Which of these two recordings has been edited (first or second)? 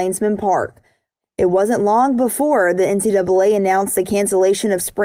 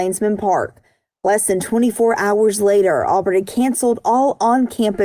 first